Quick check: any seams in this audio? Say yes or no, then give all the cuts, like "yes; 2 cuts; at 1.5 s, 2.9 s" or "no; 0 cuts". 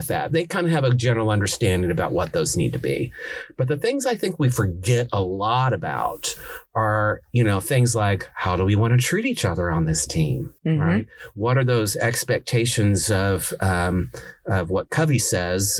yes; 1 cut; at 10.6 s